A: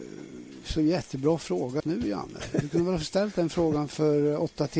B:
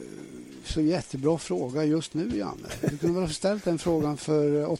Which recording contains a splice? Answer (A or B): A